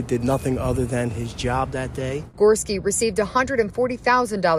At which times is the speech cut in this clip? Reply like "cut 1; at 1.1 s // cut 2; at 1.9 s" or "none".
none

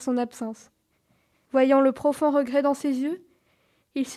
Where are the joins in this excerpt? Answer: cut 1; at 1.4 s

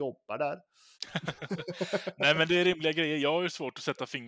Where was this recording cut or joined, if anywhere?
cut 1; at 0.9 s

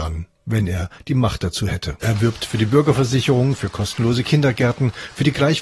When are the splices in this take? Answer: cut 1; at 2.0 s

